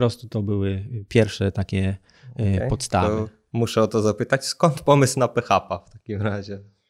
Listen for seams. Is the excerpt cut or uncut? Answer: uncut